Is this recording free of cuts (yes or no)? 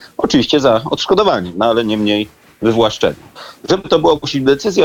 yes